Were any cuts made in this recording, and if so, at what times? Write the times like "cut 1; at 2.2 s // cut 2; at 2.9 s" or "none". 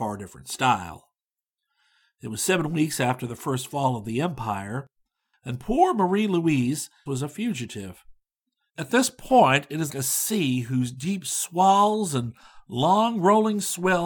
cut 1; at 7.1 s // cut 2; at 8.7 s // cut 3; at 9.9 s